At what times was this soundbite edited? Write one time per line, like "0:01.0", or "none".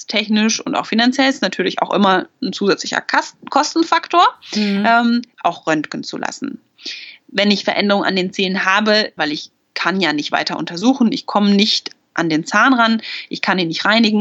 0:05.3
0:09.2